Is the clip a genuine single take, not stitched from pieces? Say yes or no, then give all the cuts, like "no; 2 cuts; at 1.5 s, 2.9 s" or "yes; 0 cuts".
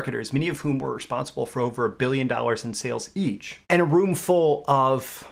no; 1 cut; at 3.6 s